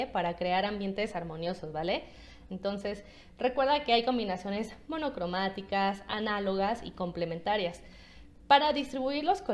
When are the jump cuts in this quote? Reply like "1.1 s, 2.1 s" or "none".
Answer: 2.5 s